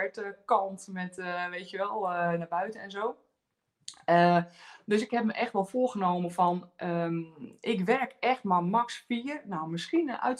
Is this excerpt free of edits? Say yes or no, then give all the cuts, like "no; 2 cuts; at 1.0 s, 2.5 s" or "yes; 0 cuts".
yes; 0 cuts